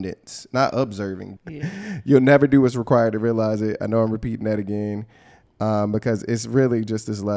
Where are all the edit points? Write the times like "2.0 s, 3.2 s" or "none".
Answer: 1.4 s